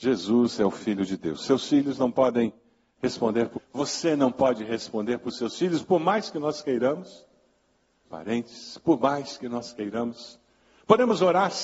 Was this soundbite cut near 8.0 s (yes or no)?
yes